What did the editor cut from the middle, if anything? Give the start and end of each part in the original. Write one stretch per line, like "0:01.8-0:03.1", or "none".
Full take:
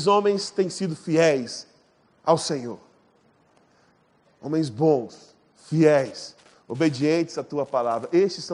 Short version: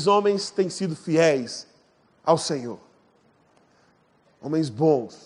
none

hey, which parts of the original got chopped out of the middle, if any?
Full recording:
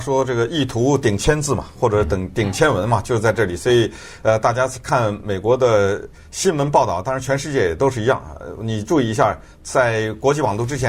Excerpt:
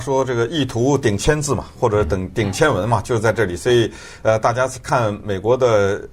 none

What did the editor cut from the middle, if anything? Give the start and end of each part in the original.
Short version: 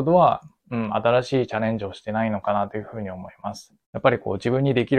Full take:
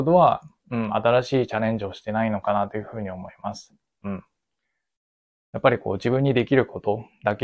0:03.8-0:05.4

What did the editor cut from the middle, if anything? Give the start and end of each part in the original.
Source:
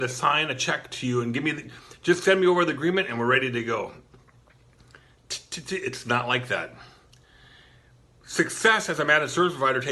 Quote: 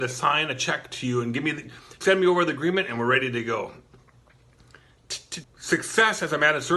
0:02.0-0:02.2
0:05.6-0:08.1

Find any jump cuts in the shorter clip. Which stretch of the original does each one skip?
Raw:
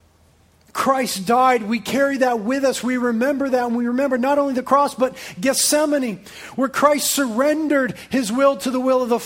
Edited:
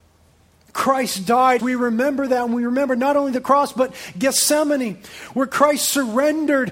0:01.6-0:02.8

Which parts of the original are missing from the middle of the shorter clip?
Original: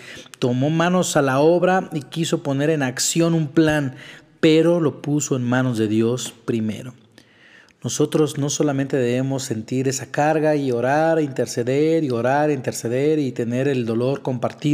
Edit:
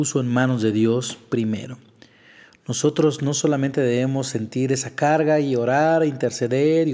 none

